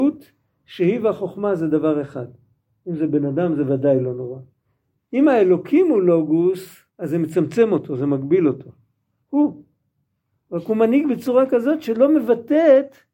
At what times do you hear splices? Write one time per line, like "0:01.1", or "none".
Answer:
0:02.8
0:06.9
0:09.2